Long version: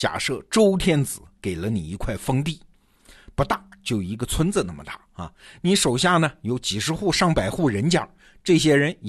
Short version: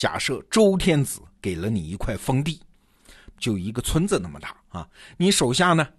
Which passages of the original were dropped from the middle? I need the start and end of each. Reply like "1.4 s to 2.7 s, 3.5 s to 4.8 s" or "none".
3.3 s to 3.8 s